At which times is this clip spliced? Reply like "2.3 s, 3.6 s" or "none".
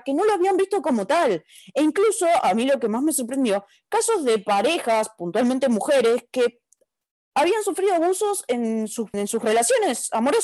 9.1 s